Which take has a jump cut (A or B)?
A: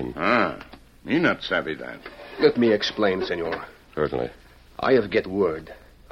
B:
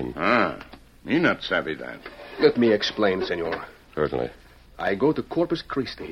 B